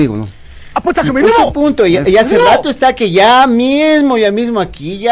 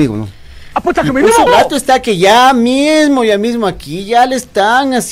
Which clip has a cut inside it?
second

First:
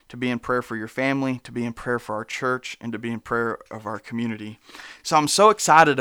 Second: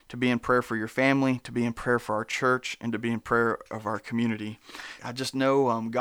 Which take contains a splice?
second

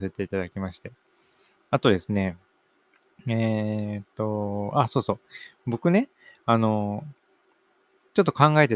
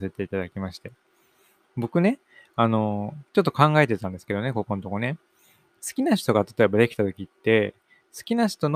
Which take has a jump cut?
second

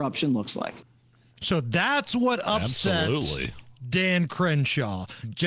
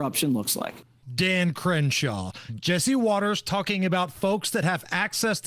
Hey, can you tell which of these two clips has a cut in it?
second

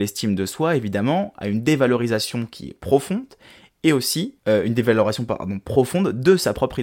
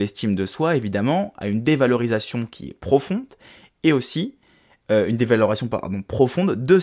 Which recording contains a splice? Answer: first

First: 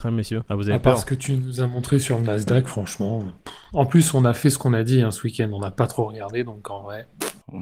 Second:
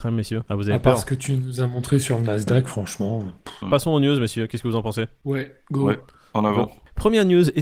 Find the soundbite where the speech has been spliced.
second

